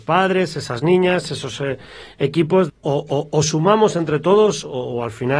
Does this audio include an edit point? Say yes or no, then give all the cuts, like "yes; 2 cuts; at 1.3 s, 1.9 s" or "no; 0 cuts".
yes; 1 cut; at 2.7 s